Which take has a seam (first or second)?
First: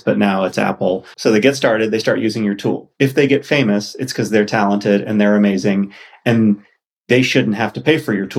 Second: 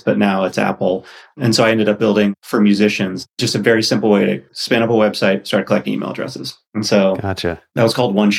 first